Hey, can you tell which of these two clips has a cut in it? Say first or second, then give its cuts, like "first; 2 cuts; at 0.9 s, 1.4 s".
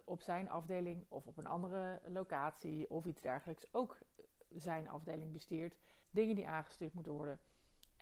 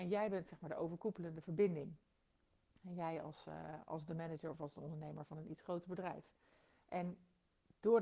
first; 1 cut; at 6.0 s